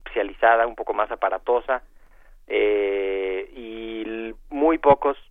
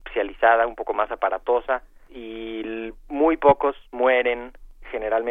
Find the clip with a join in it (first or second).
second